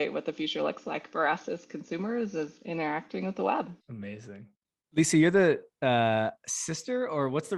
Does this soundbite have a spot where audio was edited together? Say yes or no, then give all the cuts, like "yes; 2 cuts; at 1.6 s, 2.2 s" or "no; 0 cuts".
yes; 1 cut; at 3.8 s